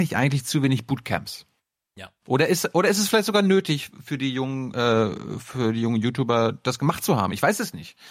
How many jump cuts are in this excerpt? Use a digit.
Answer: 0